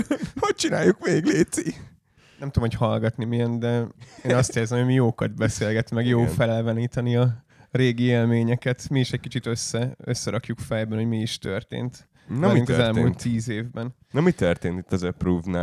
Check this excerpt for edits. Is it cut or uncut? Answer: uncut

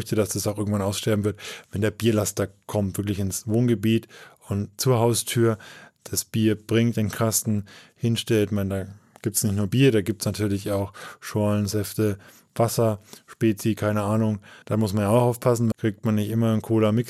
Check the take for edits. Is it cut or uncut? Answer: cut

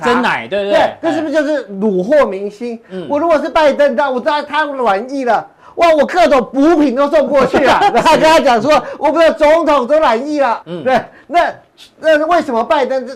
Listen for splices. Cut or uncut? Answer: cut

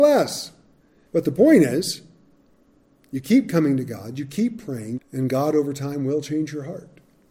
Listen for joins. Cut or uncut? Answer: cut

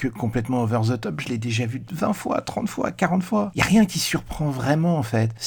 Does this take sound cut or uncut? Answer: uncut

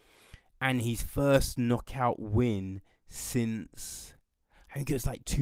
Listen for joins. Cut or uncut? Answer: uncut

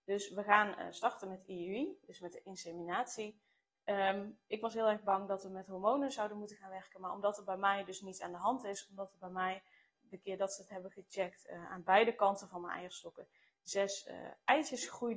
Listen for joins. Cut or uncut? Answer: cut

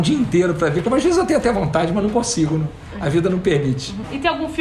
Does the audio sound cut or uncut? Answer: uncut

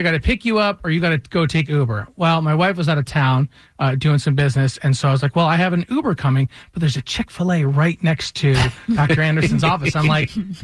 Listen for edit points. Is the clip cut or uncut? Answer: uncut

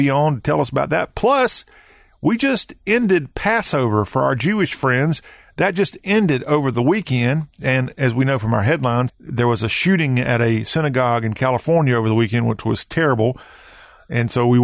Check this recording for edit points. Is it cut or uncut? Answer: cut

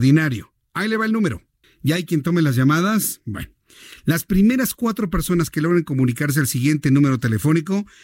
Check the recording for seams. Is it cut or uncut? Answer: cut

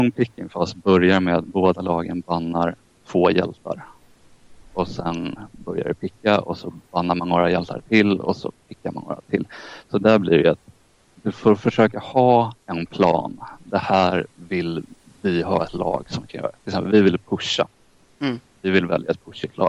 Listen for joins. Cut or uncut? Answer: uncut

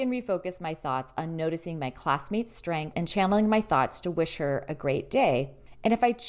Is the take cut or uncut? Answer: cut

